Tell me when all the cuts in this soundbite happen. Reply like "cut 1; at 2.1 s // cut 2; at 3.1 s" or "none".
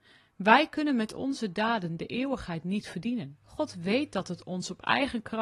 cut 1; at 3.4 s